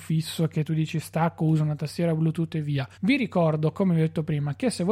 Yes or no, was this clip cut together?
yes